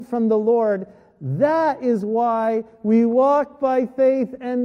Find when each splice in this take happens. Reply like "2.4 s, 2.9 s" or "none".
none